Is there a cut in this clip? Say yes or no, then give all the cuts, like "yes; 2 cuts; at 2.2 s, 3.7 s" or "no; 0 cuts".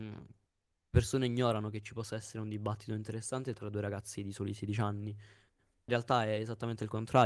no; 0 cuts